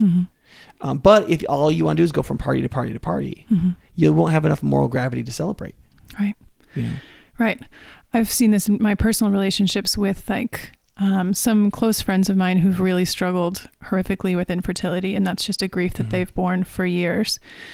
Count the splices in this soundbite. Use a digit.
0